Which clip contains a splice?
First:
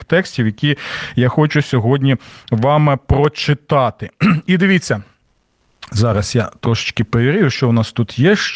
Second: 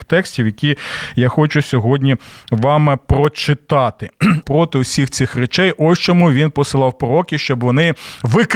second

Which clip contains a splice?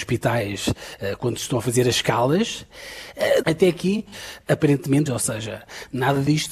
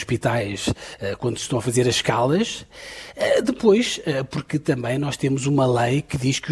first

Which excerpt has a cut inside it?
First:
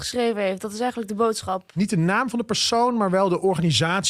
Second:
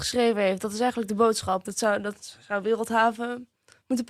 second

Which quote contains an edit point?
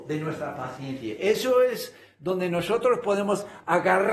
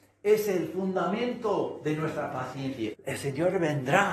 second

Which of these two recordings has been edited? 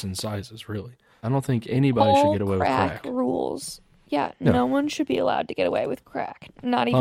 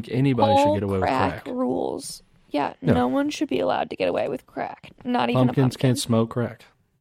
first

